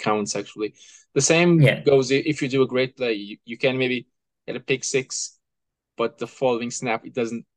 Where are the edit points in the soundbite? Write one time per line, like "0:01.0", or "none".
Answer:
none

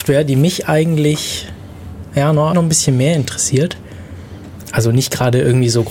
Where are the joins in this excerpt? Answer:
0:02.5
0:04.6

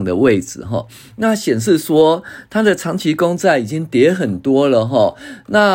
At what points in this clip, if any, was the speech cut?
none

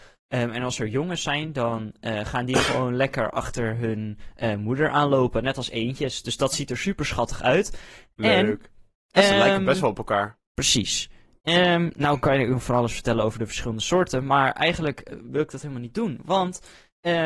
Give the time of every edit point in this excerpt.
0:09.0
0:10.6

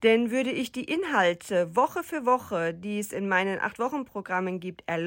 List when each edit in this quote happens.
none

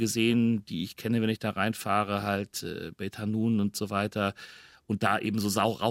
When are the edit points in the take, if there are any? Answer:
none

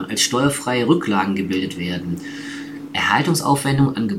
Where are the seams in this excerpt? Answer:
0:02.9

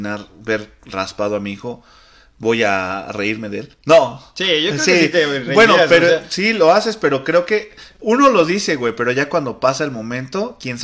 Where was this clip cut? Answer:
none

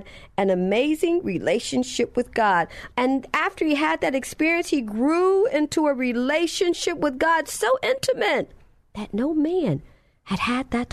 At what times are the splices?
0:02.9

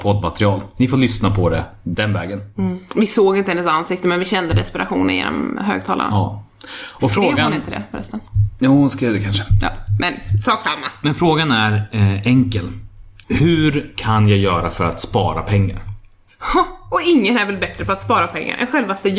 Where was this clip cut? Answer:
0:13.2

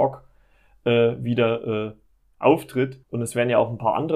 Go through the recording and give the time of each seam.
0:03.0

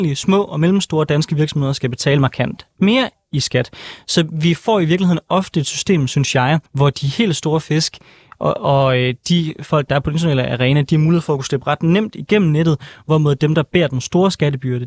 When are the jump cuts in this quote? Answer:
0:06.7

